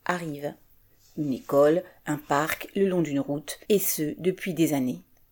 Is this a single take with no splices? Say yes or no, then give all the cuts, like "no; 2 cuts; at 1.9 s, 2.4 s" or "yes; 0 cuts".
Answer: no; 1 cut; at 3.6 s